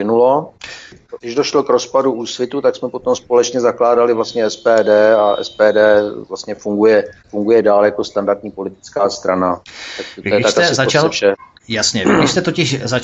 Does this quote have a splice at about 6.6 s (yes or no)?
no